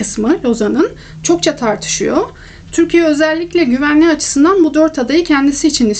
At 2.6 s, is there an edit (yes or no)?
no